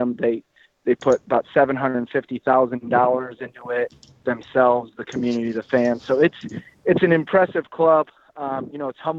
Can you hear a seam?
no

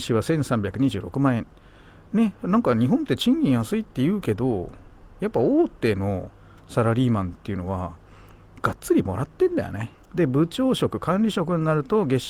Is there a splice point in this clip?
yes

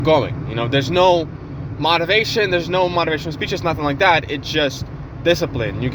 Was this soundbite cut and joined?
no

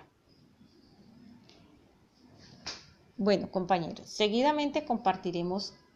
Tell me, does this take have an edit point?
no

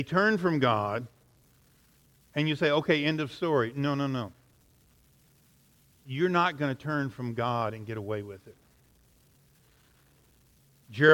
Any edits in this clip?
no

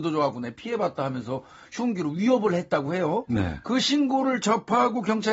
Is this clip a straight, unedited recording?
yes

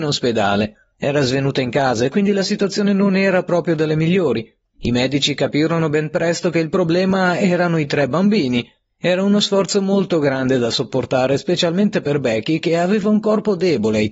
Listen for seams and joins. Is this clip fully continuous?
no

